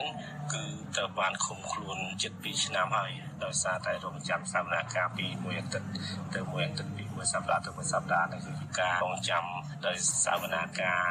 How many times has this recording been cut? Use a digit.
1